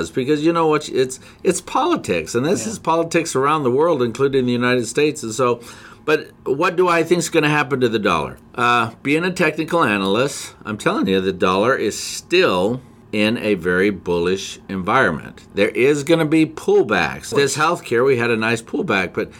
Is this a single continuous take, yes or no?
no